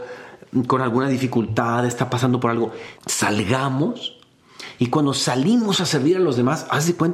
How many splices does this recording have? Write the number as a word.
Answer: one